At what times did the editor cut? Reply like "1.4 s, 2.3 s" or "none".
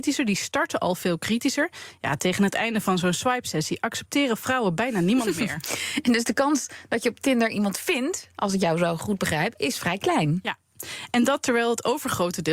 none